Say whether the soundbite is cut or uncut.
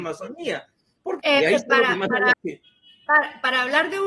cut